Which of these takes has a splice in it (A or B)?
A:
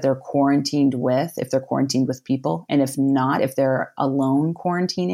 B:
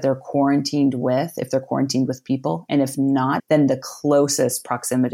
B